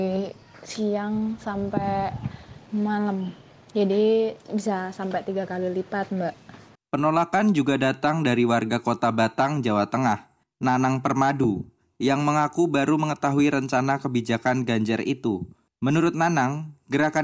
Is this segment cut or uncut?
uncut